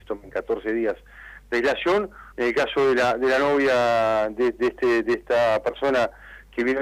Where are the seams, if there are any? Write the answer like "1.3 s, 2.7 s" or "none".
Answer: 2.3 s